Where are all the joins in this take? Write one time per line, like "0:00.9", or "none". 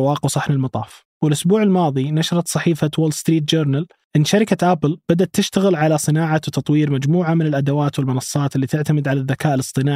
0:01.1